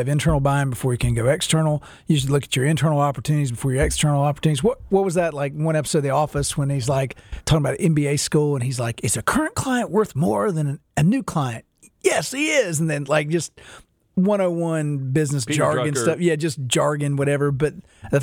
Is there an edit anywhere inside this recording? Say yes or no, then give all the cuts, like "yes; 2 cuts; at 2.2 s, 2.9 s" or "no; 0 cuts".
no; 0 cuts